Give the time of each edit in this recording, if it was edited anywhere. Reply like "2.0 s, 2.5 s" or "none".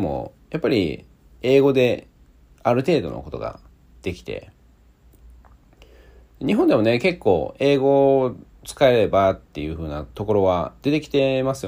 none